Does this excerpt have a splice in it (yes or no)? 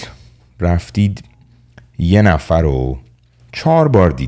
no